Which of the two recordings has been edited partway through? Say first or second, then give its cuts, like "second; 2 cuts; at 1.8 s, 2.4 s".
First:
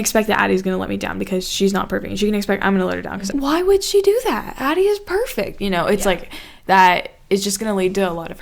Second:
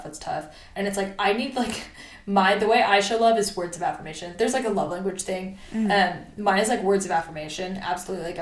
first; 1 cut; at 3.3 s